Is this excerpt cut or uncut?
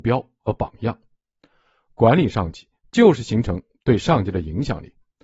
uncut